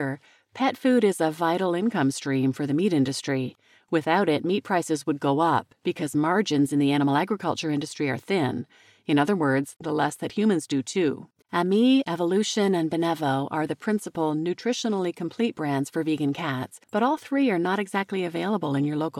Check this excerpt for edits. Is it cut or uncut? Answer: cut